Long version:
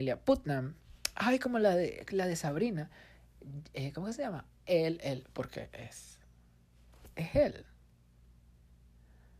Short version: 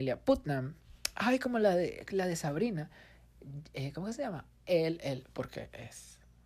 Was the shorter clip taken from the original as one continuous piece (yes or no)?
yes